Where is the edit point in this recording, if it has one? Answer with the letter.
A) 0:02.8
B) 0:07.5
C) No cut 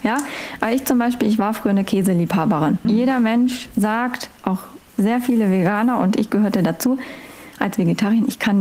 A